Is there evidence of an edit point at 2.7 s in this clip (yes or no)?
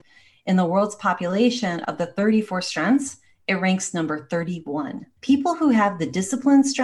no